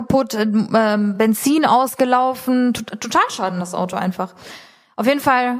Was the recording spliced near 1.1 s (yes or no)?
no